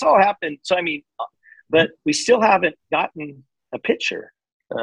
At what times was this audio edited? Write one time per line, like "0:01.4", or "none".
0:01.3